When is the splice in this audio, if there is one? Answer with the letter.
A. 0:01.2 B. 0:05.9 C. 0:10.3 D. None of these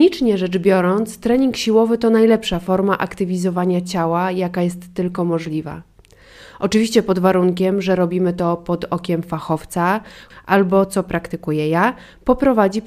C